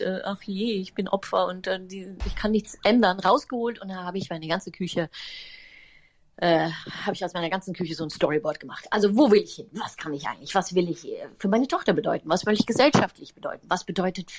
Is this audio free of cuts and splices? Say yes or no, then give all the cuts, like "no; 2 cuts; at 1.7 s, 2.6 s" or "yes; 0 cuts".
yes; 0 cuts